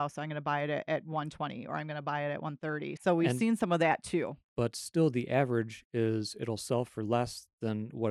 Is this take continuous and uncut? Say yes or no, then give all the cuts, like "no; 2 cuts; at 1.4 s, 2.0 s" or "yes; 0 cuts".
no; 2 cuts; at 3.0 s, 4.5 s